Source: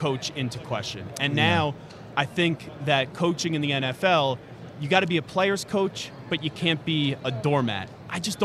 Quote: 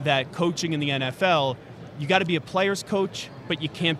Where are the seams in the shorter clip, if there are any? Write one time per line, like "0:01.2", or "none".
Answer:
none

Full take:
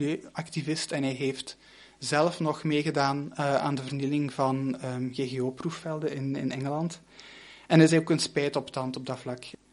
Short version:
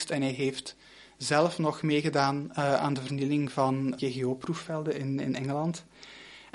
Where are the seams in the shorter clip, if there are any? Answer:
0:04.0

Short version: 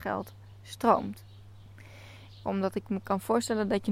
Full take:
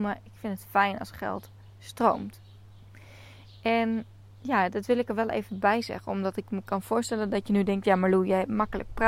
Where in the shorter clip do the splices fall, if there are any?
0:02.4

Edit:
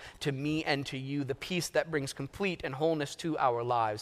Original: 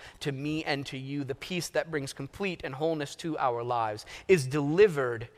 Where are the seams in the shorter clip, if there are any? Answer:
none

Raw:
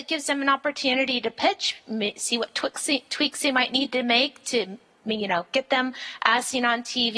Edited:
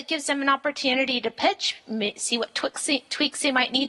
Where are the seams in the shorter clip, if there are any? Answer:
none

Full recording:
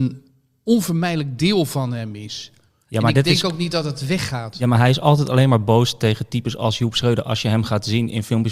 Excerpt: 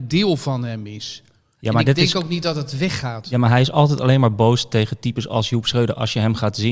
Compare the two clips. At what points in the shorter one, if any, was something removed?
none

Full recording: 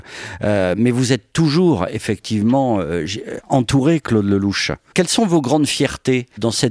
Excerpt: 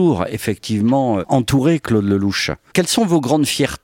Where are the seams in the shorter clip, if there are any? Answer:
0:01.2

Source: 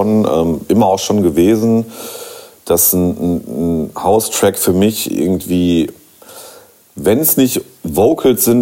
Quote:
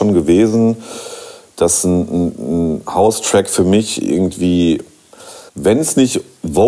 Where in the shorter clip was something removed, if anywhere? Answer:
0:05.5

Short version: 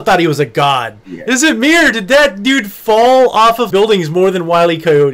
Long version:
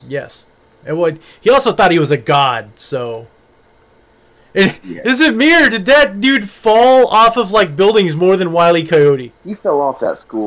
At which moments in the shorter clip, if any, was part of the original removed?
0:01.0
0:03.7

